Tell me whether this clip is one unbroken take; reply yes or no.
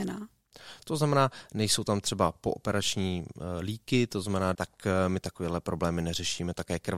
no